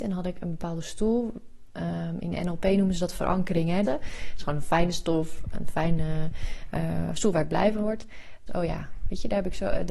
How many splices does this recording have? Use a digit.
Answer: 2